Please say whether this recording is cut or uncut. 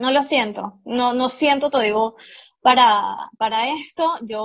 uncut